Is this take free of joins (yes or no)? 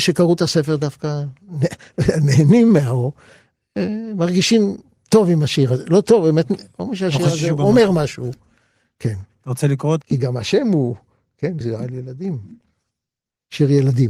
no